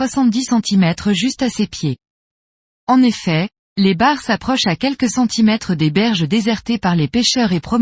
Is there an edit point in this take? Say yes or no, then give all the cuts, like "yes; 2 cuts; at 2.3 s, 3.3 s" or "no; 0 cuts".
no; 0 cuts